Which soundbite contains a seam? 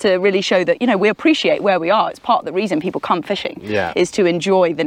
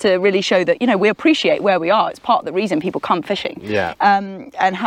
second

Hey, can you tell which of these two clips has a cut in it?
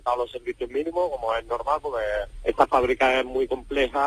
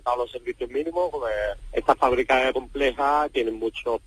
second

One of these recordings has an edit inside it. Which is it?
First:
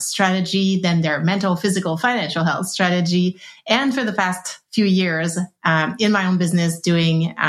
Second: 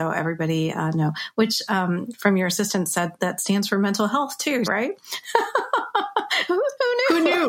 second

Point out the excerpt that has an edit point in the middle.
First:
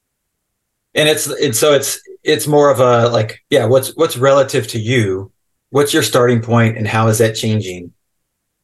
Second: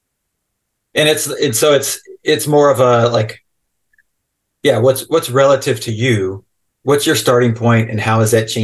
first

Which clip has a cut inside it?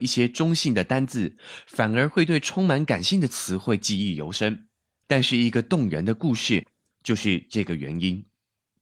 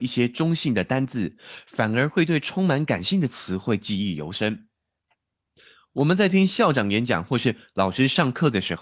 first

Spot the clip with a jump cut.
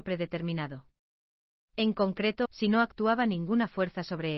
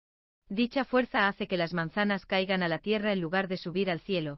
first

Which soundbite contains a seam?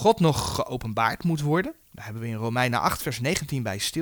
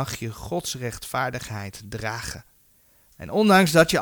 first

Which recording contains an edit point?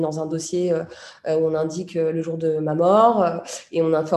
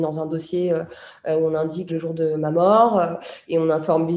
second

